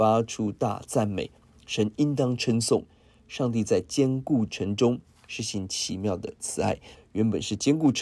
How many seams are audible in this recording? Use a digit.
1